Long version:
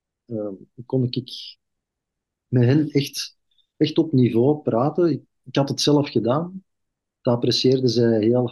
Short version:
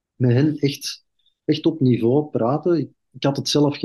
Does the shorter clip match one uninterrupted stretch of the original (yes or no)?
yes